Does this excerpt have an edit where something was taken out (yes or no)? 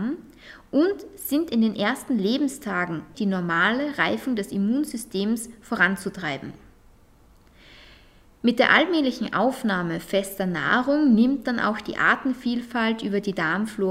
yes